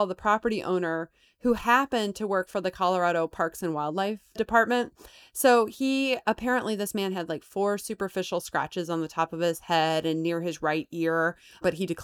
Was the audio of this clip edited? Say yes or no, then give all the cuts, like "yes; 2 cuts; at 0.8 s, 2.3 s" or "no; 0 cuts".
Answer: no; 0 cuts